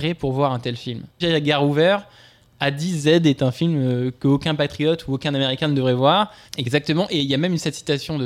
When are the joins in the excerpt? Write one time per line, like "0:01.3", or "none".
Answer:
0:01.2
0:06.5